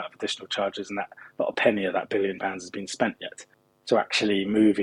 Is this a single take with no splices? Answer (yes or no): yes